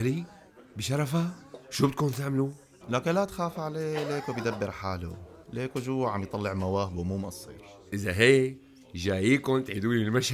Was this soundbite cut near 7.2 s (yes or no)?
no